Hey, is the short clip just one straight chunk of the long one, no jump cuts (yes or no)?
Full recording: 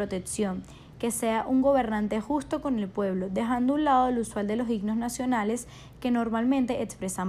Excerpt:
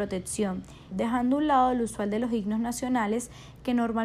no